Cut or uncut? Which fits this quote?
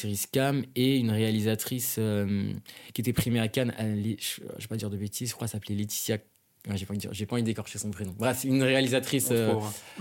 uncut